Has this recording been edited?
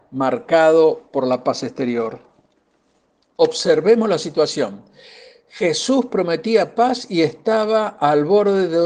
no; 0 cuts

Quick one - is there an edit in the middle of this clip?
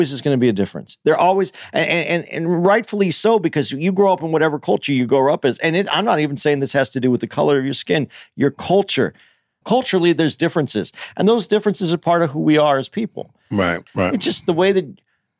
yes; 2 cuts; at 9.6 s, 13.9 s

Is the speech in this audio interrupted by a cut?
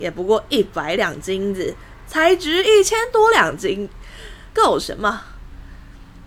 yes; 1 cut; at 4.5 s

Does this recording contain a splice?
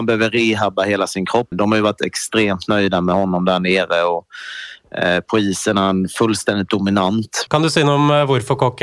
yes; 2 cuts; at 1.5 s, 7.5 s

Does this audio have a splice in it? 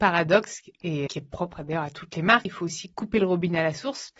yes; 2 cuts; at 1.1 s, 2.5 s

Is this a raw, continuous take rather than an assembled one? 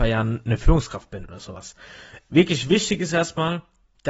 yes; 0 cuts

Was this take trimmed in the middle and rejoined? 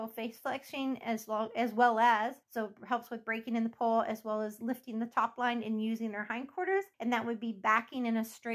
yes; 2 cuts; at 2.4 s, 6.9 s

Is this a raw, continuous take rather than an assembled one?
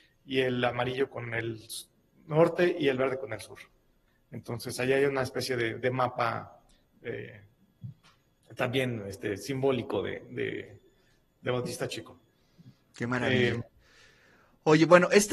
yes; 0 cuts

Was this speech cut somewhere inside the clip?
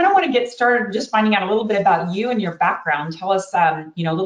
no; 0 cuts

